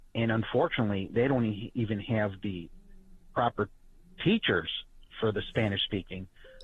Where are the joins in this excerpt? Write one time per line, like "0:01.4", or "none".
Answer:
0:05.1